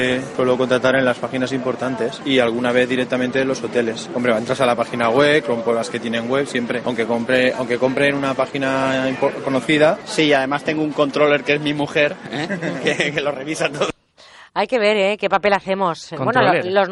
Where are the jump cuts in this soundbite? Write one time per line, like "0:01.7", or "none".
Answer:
none